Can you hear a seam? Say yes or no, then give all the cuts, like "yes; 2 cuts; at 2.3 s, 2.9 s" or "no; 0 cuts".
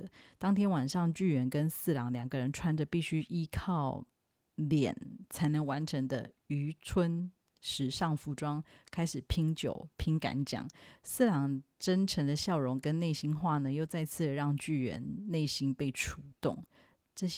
no; 0 cuts